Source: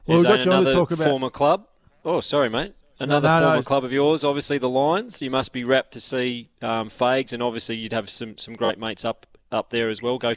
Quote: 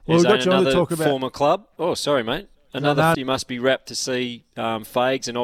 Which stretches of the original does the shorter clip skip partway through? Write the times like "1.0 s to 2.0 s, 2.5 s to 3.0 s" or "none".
1.7 s to 2.0 s, 3.4 s to 5.2 s

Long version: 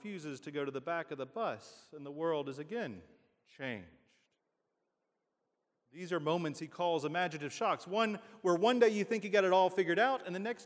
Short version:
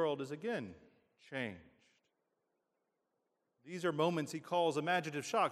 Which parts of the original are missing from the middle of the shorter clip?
none

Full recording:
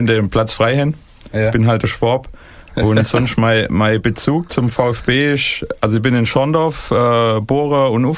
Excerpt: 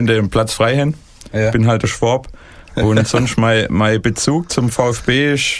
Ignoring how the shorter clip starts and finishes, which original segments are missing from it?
none

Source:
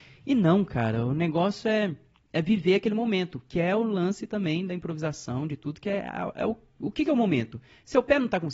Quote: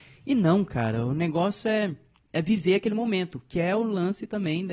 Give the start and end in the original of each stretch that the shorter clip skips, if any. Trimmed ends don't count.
none

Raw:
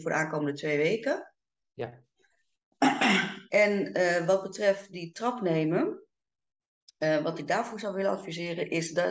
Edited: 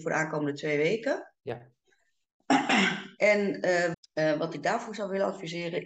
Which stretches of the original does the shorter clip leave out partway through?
1.4 s to 1.7 s, 4.3 s to 6.8 s

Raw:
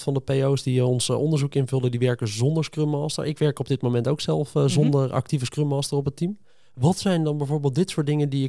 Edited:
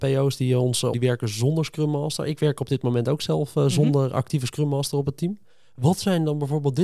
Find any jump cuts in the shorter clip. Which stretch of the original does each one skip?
1.2 s to 1.9 s

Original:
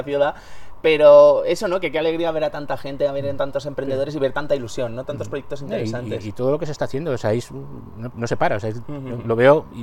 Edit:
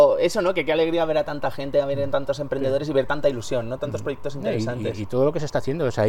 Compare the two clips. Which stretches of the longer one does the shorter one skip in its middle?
none

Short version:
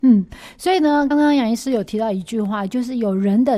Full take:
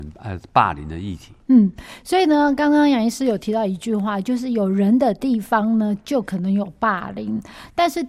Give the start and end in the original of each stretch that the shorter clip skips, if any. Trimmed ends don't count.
2.6 s to 2.6 s

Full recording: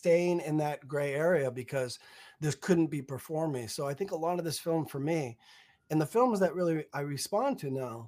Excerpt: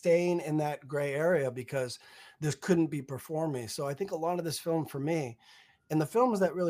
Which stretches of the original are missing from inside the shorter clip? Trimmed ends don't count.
none

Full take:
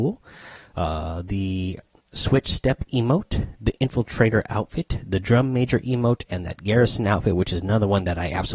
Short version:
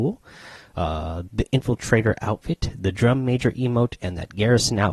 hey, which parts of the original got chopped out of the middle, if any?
1.3 s to 3.6 s

